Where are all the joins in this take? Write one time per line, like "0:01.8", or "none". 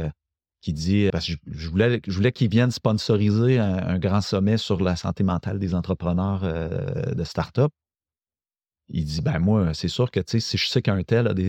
0:01.1